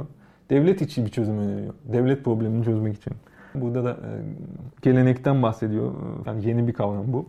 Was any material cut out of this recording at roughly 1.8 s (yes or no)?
no